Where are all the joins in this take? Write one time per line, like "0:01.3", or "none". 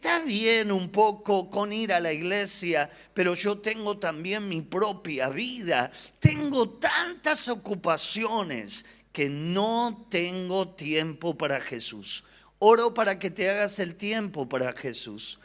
0:06.2